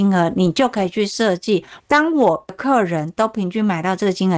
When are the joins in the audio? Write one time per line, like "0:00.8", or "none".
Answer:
0:01.8